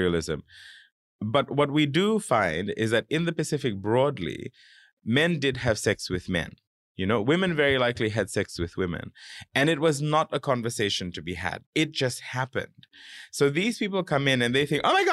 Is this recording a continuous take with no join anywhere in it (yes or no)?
yes